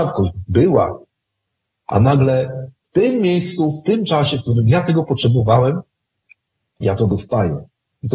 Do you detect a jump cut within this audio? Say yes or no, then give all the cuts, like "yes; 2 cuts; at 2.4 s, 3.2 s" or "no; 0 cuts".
no; 0 cuts